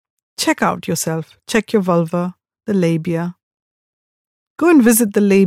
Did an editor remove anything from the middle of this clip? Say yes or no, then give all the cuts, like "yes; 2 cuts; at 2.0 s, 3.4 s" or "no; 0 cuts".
no; 0 cuts